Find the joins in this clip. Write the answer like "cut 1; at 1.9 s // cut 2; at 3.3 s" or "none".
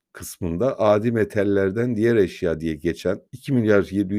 cut 1; at 3.3 s